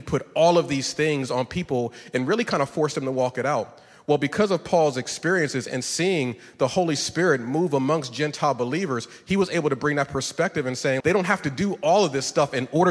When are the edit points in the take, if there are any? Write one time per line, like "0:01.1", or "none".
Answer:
0:11.0